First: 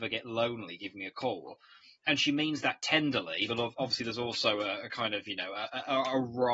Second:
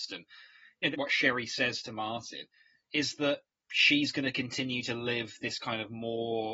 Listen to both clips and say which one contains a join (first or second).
second